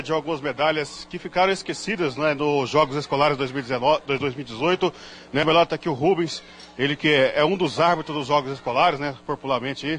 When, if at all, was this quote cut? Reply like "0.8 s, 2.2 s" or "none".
none